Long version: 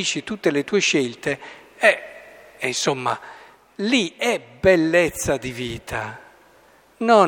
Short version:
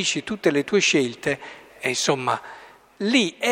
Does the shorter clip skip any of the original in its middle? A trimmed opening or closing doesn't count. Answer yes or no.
yes